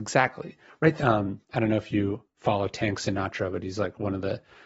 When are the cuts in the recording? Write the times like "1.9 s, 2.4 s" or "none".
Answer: 1.0 s